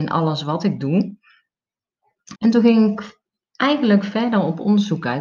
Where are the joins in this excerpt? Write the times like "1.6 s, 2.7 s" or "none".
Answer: 2.4 s